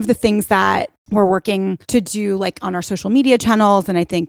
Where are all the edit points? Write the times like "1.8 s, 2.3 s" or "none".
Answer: 1.8 s